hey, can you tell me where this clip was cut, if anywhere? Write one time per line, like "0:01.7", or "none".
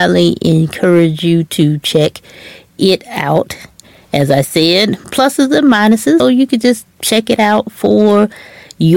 0:05.0
0:06.2